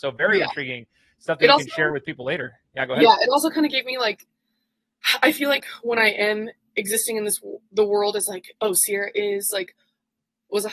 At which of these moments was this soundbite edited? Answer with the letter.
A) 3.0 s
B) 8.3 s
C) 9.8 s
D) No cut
D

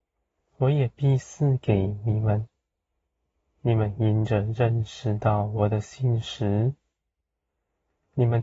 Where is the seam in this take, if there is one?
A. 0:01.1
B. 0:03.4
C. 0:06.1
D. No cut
D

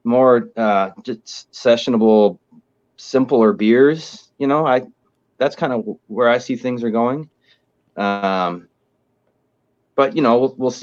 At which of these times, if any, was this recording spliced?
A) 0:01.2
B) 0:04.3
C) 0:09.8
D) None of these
D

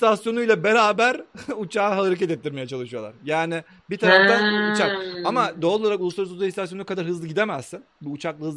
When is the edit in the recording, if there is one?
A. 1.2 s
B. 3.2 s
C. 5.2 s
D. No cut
D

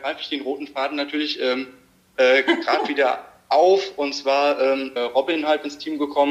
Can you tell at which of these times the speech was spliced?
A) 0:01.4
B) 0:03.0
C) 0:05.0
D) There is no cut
C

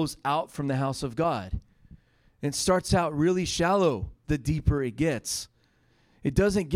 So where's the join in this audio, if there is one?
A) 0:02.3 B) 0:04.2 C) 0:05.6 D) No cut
B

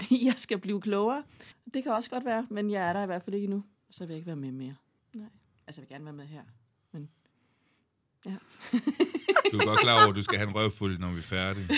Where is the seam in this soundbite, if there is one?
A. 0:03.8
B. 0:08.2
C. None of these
A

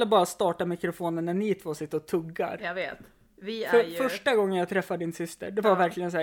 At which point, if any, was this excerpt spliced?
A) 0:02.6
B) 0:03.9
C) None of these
C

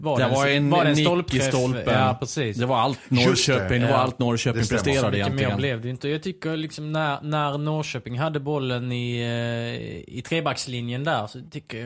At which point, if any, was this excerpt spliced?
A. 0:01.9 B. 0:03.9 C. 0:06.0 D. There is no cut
D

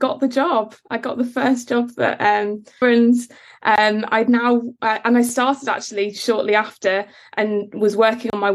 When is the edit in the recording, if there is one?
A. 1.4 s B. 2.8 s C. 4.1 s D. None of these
B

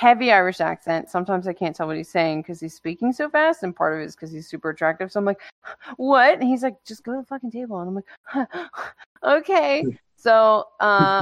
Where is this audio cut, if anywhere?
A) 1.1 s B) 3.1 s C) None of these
C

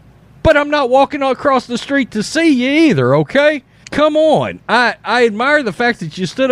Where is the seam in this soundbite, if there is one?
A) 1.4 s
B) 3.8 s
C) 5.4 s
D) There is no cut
B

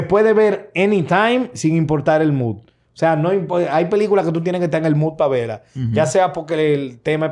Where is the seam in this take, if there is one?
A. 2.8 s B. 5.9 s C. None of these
C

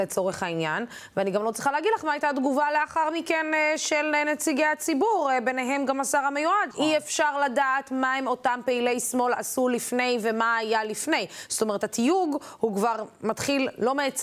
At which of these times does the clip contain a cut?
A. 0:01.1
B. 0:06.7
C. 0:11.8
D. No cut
B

